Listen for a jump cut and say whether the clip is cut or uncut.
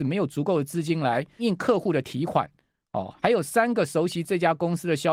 cut